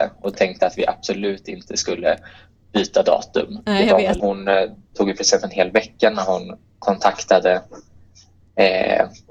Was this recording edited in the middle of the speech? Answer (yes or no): yes